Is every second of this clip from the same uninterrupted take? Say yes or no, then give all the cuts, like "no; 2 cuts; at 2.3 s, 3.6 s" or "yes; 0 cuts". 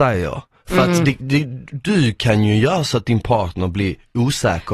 yes; 0 cuts